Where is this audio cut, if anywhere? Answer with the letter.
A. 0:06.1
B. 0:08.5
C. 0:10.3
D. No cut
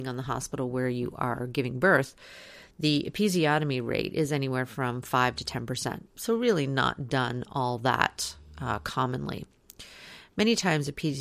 A